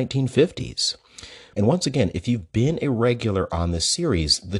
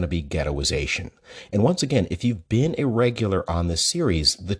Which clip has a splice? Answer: first; 1 cut; at 1.5 s

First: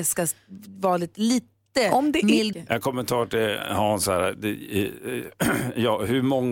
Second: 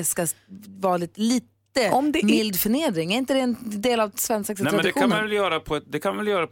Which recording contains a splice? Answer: first; 1 cut; at 2.5 s

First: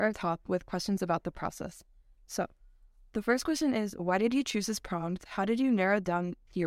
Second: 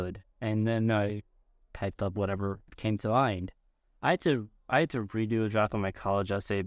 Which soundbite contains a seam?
second; 1 cut; at 3.9 s

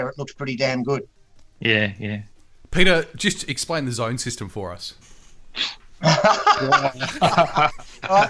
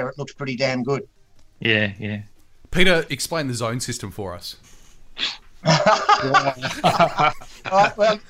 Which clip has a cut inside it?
second; 1 cut; at 3.1 s

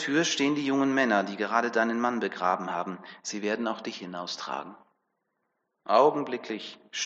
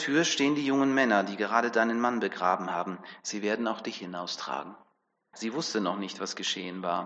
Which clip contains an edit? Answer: second; 1 cut; at 5.3 s

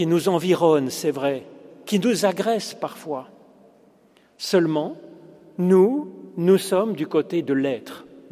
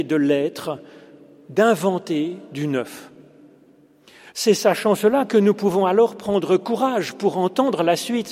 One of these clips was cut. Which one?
second; 1 cut; at 4.3 s

